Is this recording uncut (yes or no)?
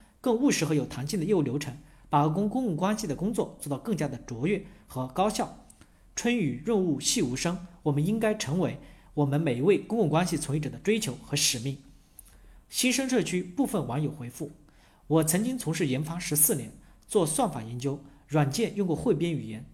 yes